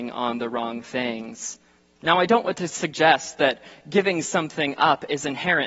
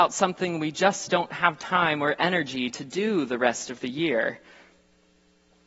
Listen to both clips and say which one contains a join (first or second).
first